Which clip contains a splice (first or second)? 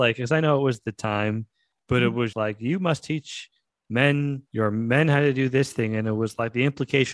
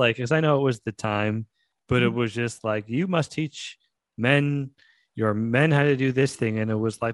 first